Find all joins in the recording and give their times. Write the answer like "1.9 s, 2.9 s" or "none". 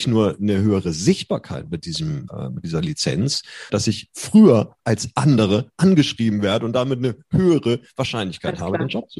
2.3 s, 3.7 s